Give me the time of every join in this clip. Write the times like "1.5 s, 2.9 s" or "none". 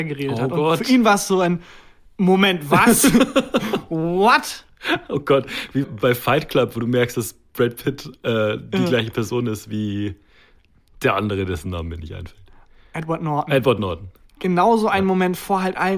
5.8 s

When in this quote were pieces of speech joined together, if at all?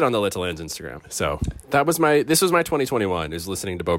1.0 s

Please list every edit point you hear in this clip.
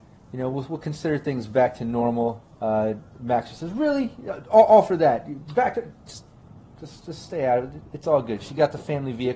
none

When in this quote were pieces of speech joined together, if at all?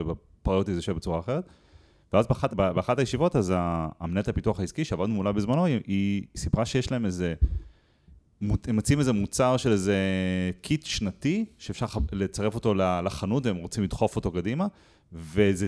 2.5 s

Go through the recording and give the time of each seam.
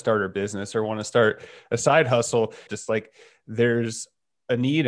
2.7 s

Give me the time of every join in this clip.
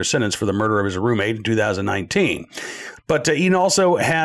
3.0 s

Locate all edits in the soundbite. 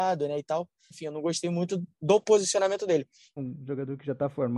0.9 s, 3.4 s

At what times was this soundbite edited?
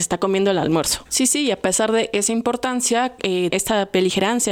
1.1 s, 3.5 s

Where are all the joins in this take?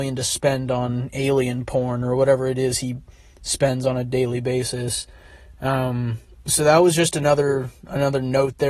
none

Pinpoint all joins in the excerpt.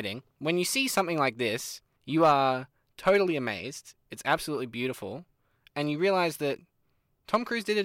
4.0 s

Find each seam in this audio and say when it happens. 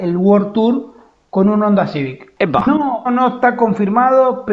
3.1 s

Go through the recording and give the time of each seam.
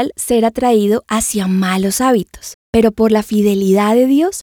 none

